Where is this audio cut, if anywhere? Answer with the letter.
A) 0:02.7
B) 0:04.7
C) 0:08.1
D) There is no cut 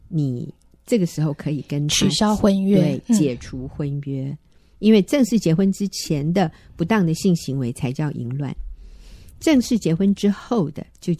B